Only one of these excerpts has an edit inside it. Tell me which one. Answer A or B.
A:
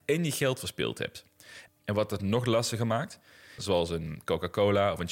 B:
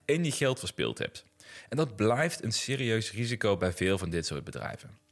A